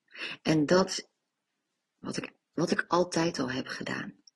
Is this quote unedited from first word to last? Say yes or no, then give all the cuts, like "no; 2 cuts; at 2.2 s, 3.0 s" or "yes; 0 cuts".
no; 1 cut; at 2.0 s